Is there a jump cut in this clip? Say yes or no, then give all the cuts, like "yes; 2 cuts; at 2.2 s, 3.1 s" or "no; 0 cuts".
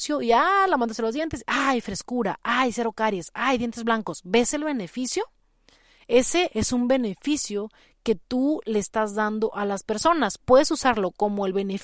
yes; 1 cut; at 6.5 s